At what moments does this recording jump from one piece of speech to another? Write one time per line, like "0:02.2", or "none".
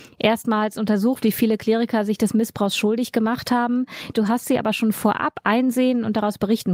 0:04.1